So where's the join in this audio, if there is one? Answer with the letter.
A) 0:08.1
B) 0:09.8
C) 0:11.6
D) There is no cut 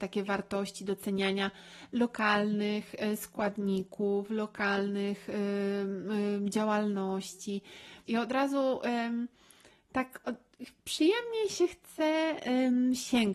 A